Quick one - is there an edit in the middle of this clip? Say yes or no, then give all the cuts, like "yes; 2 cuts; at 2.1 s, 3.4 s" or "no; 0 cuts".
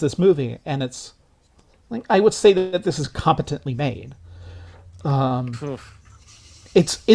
no; 0 cuts